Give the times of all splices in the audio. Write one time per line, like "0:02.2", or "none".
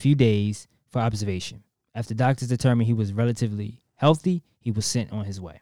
none